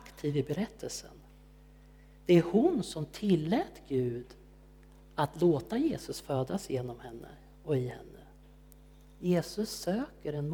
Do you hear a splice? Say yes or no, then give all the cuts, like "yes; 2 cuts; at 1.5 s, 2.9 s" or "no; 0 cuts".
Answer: no; 0 cuts